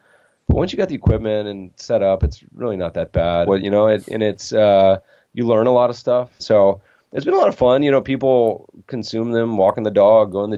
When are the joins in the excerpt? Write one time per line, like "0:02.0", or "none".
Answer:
0:03.5
0:06.4